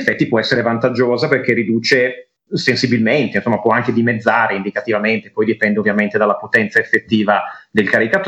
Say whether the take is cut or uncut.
uncut